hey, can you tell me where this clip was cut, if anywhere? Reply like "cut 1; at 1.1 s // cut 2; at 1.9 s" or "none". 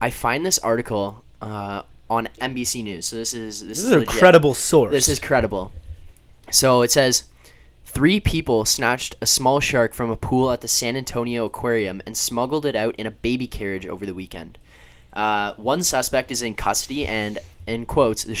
cut 1; at 2.4 s